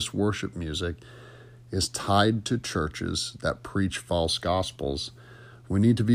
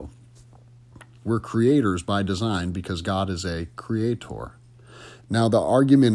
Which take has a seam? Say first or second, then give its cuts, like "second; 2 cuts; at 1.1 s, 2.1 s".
second; 2 cuts; at 1.2 s, 5.2 s